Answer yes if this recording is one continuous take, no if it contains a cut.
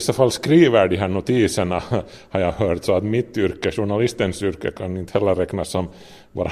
yes